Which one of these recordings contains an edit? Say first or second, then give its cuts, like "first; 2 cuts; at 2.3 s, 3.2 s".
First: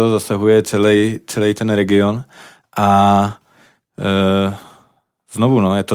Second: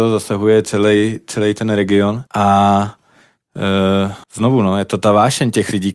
second; 2 cuts; at 2.3 s, 4.2 s